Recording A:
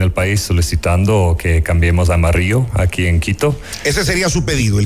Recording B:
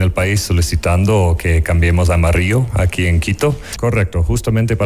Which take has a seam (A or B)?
B